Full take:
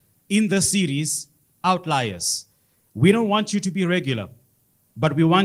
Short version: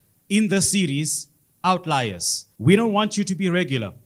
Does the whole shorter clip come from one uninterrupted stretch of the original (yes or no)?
no